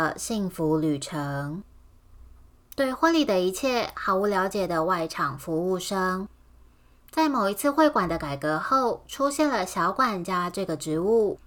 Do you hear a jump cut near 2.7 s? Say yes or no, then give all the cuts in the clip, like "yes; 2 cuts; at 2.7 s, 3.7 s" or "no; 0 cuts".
yes; 1 cut; at 2.7 s